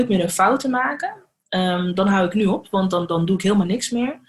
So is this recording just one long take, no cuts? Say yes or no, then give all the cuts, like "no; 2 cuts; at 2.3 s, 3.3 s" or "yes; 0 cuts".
yes; 0 cuts